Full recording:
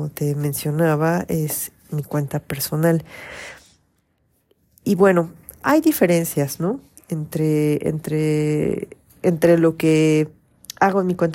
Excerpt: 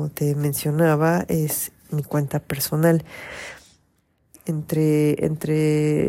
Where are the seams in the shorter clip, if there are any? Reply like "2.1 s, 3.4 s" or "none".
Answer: 4.3 s